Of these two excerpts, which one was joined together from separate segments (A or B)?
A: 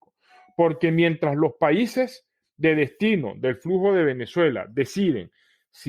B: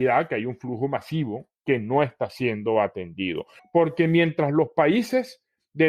B